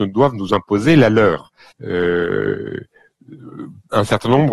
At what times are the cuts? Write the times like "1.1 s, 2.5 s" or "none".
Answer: 1.7 s